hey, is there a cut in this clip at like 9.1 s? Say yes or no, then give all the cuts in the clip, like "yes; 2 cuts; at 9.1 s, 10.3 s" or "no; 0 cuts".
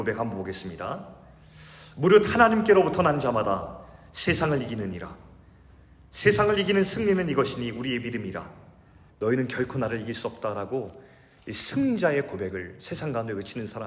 yes; 1 cut; at 9.1 s